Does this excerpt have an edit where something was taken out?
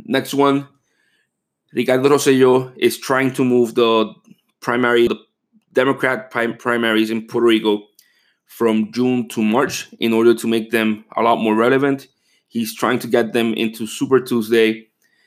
yes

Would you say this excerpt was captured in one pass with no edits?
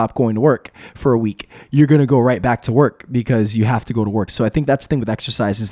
no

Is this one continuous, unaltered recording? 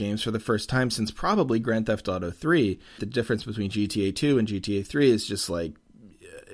no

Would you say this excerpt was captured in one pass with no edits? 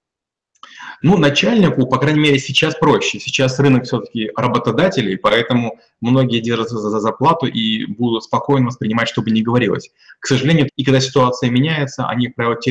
no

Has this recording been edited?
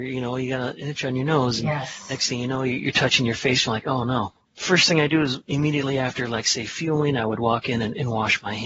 no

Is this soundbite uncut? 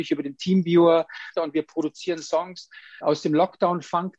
no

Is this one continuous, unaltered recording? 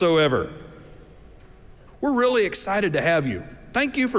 no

